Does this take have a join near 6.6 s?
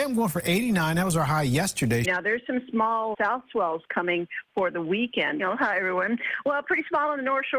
no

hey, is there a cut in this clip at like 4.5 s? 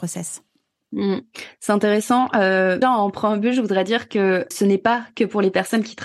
yes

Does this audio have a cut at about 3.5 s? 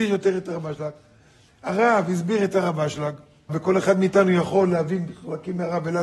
yes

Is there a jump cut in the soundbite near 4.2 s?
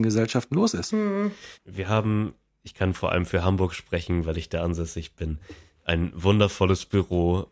no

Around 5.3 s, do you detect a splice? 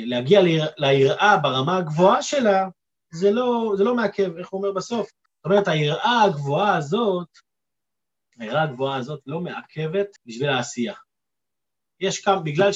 yes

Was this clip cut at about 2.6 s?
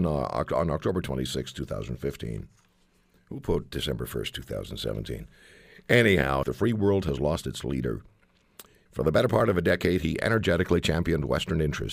no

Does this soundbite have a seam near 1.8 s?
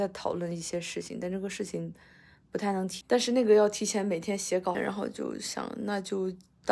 no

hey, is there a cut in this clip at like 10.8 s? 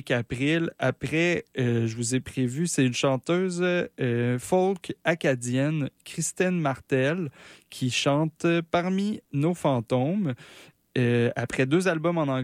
no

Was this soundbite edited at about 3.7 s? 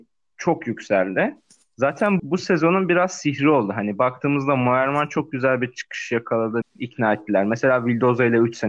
no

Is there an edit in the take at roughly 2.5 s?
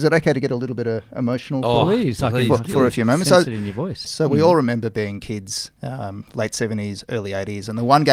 no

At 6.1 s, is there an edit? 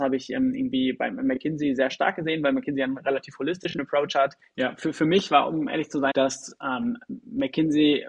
yes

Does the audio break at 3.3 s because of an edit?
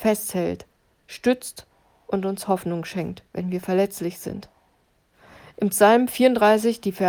yes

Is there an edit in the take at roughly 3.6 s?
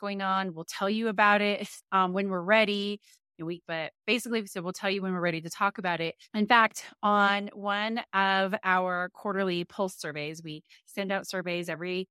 yes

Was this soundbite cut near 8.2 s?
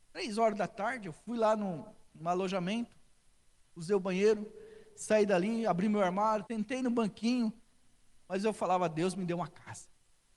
yes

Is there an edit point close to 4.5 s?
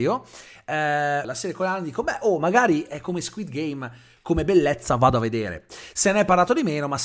no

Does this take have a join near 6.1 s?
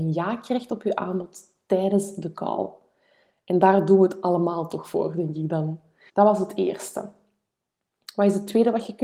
yes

